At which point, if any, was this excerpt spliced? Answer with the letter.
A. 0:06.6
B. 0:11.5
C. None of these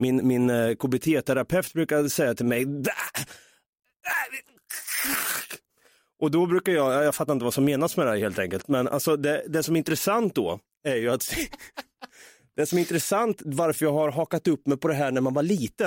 C